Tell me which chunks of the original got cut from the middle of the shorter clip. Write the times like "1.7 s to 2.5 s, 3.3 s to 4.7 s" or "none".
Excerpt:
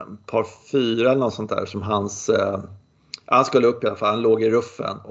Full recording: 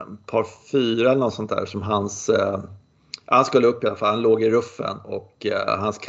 none